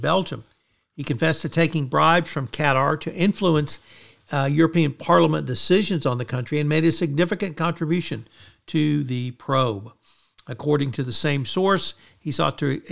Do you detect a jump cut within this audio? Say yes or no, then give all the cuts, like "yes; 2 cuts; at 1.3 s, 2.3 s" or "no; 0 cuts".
no; 0 cuts